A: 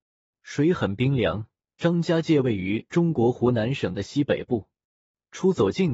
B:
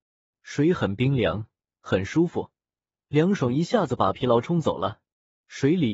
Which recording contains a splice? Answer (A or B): A